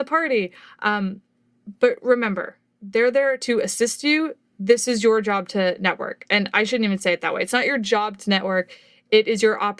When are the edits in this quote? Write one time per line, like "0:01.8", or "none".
none